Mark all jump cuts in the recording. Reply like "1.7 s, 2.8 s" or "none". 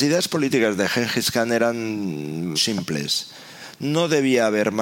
2.6 s